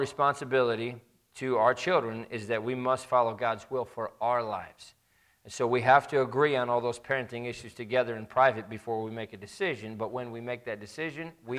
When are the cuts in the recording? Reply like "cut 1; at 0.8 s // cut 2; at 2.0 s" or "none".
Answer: none